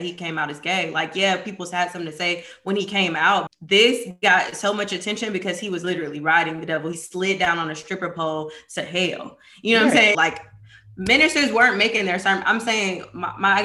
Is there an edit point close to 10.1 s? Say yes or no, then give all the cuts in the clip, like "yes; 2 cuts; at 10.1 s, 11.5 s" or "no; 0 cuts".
yes; 2 cuts; at 3.5 s, 10.1 s